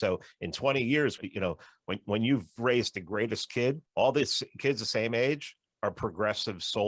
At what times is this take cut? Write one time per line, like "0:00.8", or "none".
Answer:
0:01.2
0:03.9